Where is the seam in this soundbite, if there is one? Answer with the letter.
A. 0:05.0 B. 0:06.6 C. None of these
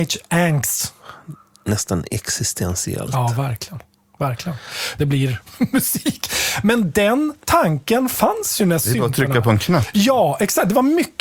A